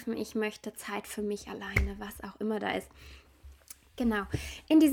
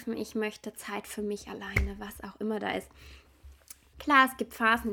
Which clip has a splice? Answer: second; 1 cut; at 3.9 s

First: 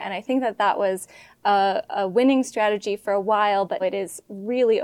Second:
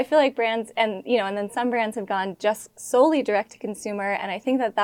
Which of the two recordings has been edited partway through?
first; 1 cut; at 3.8 s

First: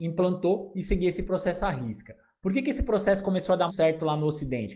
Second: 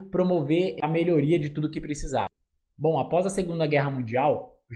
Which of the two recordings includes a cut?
first; 1 cut; at 3.7 s

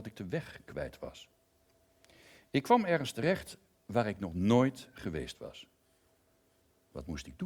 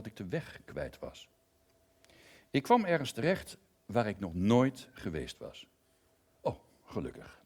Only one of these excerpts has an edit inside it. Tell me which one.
second; 1 cut; at 6.3 s

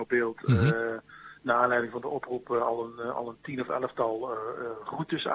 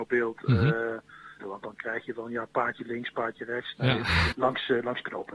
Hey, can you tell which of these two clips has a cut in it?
second; 2 cuts; at 1.4 s, 4.3 s

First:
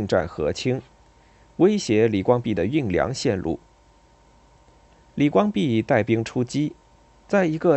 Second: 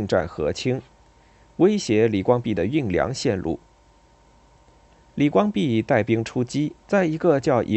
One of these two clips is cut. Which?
second; 1 cut; at 6.8 s

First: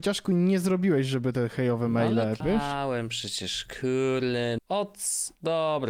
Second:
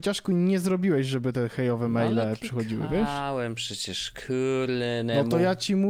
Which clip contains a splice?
first; 2 cuts; at 2.4 s, 4.6 s

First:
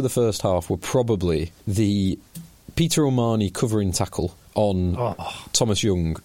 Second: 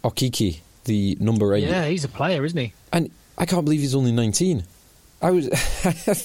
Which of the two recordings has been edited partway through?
first; 2 cuts; at 1.6 s, 4.4 s

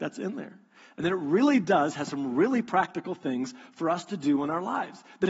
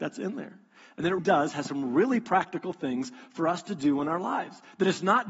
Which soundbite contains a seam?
second; 1 cut; at 1.2 s

